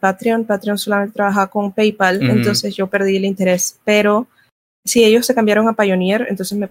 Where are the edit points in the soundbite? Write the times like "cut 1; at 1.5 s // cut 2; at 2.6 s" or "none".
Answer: none